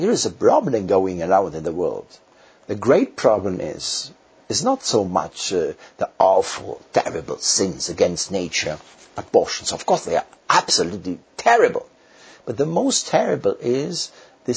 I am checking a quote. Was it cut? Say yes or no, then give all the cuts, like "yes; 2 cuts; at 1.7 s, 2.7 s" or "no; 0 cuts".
no; 0 cuts